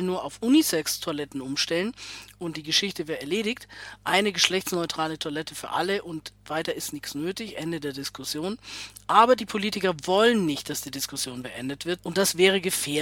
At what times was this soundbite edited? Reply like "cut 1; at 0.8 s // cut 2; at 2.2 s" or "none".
cut 1; at 12.0 s